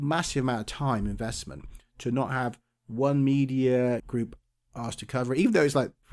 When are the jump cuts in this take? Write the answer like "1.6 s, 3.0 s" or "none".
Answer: 4.0 s

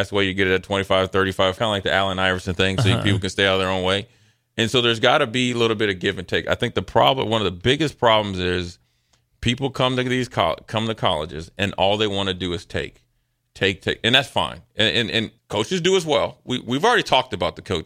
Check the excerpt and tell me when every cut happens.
1.6 s, 15.4 s

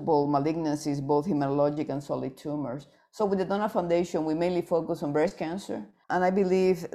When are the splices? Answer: 6.0 s

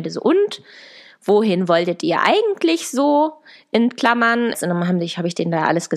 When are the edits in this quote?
4.5 s

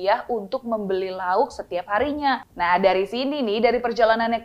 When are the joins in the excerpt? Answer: 2.4 s

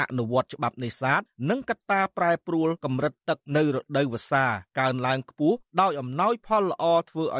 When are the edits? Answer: none

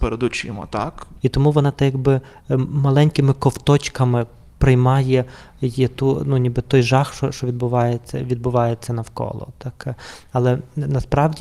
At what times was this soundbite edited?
1.2 s

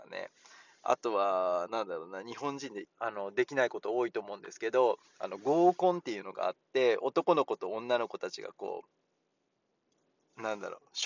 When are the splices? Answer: 2.8 s

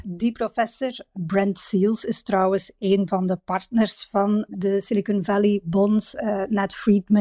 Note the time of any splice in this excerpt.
none

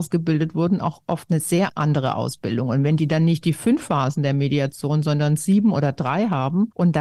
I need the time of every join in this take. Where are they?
none

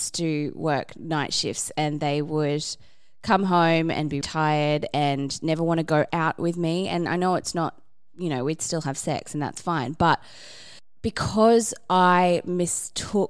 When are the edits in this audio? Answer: 4.2 s, 6.1 s

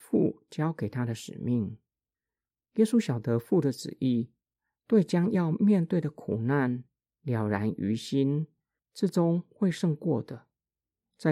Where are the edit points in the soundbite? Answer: 8.8 s

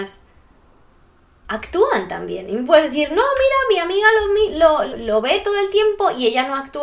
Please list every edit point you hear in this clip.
4.9 s

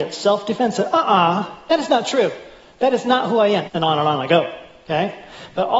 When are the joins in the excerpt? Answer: 3.7 s

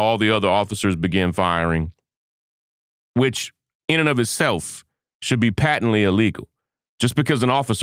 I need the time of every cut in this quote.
none

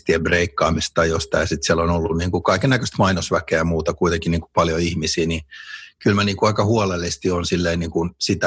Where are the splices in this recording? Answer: none

